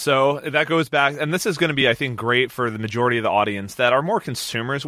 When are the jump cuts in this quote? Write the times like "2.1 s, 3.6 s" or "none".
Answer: none

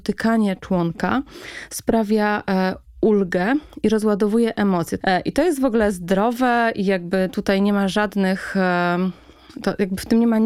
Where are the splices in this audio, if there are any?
5.0 s

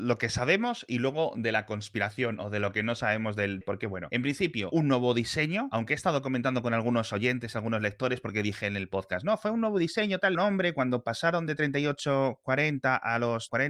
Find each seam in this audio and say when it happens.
3.6 s, 10.4 s

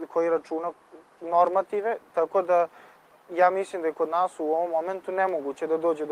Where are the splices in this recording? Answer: none

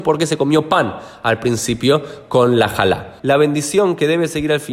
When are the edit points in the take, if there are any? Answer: 3.2 s

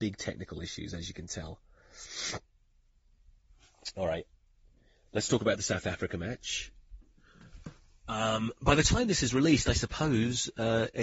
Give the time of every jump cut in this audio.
none

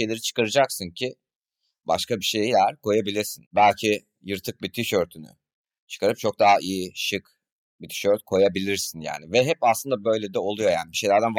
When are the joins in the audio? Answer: none

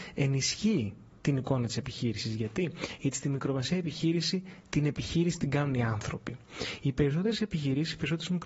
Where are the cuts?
none

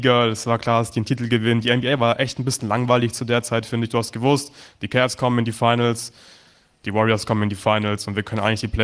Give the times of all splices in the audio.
none

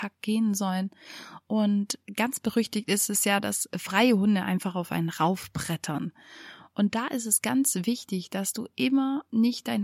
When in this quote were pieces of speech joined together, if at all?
none

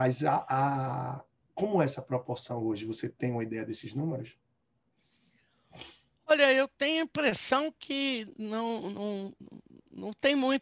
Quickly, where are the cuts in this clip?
none

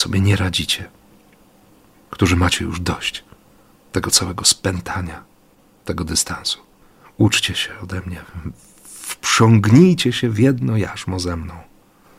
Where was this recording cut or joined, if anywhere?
none

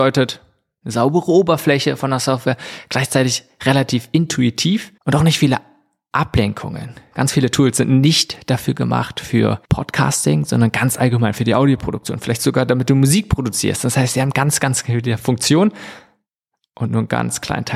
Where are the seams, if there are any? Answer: 5.0 s

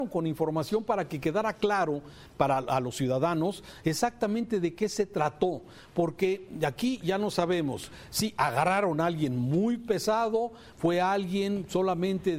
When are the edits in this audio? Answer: none

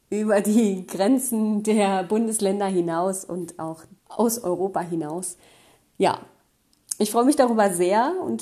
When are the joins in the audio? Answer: 4.0 s

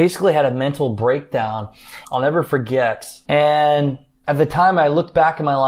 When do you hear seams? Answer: 2.0 s, 3.2 s

